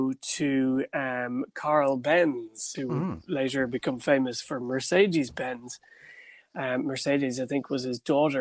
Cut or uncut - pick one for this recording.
cut